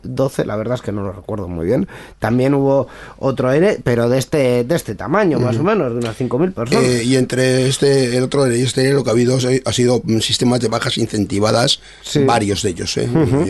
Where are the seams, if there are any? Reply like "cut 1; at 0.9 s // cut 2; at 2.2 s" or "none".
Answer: none